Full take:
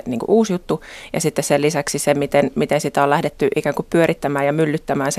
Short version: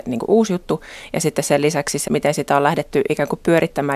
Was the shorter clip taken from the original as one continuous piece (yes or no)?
no